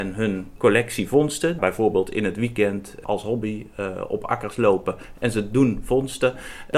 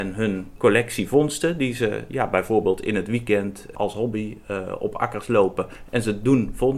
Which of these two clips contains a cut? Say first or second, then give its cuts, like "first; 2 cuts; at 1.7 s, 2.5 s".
first; 1 cut; at 1.6 s